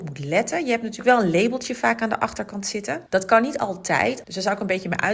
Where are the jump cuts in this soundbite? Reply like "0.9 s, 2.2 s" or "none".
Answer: 3.1 s, 4.2 s